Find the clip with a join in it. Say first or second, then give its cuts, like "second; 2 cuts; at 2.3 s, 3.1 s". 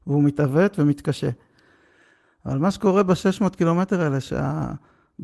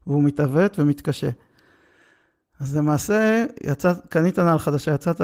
first; 1 cut; at 2.2 s